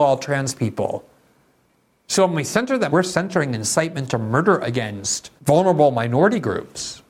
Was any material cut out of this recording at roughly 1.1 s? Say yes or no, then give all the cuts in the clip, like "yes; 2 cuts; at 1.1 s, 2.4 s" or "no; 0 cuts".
no; 2 cuts; at 2.9 s, 5.4 s